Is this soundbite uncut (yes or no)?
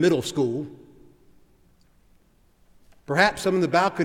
yes